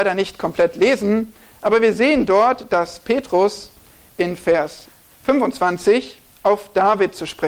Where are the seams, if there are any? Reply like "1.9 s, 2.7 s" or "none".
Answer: none